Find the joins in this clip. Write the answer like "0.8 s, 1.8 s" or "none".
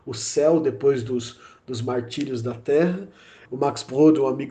3.4 s